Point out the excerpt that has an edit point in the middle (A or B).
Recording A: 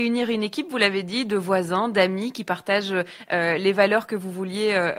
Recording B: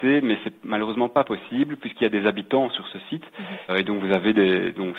B